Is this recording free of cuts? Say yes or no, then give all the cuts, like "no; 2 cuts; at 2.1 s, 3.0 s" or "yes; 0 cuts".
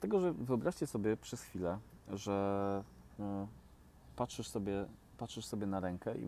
yes; 0 cuts